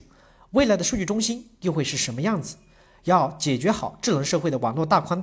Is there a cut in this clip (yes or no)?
no